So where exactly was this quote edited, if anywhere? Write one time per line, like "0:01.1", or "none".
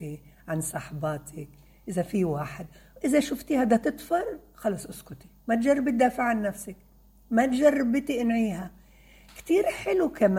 0:05.4